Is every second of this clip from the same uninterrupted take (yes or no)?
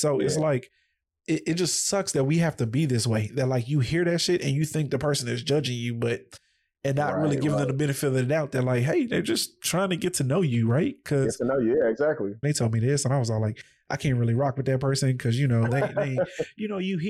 no